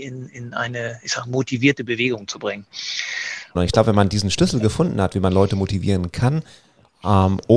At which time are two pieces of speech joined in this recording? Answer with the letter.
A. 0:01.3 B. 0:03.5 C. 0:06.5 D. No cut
B